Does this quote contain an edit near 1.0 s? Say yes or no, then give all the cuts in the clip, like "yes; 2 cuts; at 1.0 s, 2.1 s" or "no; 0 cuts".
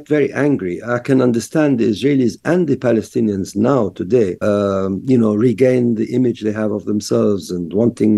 no; 1 cut; at 4.4 s